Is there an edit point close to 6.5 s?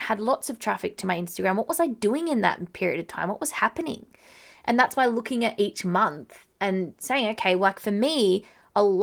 yes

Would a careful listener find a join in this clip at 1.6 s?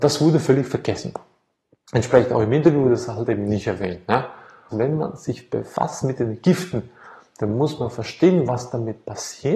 no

